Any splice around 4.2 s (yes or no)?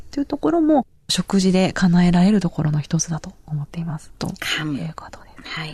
yes